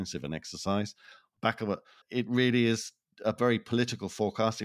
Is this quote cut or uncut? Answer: cut